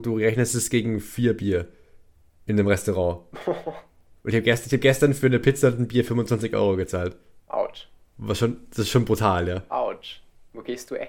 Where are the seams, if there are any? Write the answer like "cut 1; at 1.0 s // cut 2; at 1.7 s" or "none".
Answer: none